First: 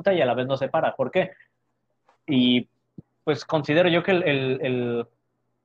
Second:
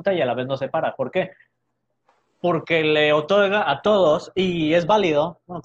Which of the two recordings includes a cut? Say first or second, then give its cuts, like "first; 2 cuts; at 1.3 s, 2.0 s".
first; 1 cut; at 2.1 s